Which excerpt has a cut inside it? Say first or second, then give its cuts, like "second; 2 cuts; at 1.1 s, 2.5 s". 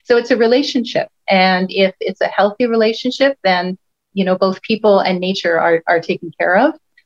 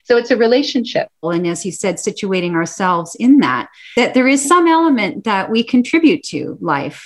second; 1 cut; at 1.2 s